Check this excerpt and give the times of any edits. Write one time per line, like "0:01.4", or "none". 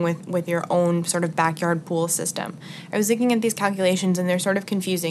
none

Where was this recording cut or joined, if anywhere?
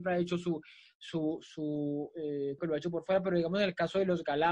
0:02.6

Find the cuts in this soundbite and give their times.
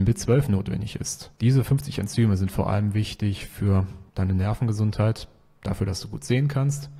0:01.4
0:04.1

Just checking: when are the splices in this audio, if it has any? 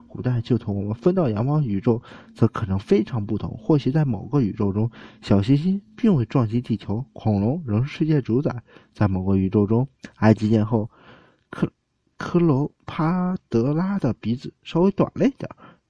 none

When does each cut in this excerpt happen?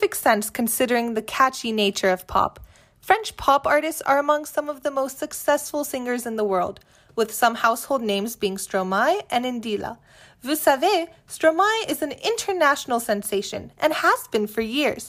none

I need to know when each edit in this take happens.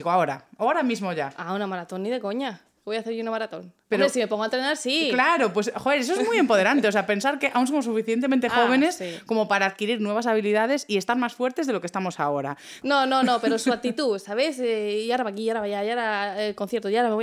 0:12.8

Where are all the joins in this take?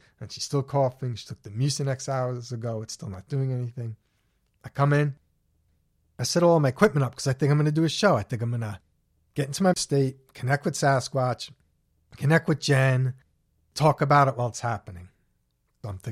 none

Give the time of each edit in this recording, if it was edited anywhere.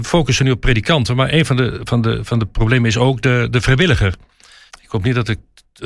0:04.7

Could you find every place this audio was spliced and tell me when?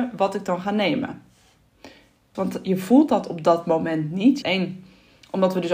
0:02.3
0:04.4

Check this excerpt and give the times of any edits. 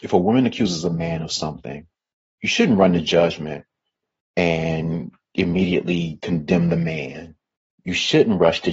0:07.7

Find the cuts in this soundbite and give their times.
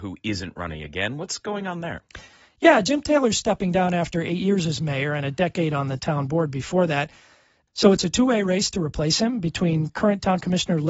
none

